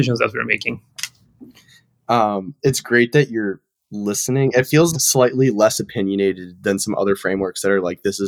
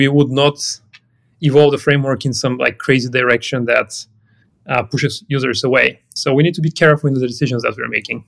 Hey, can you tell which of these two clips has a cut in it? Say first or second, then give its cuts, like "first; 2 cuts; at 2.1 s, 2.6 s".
first; 2 cuts; at 2.6 s, 4.9 s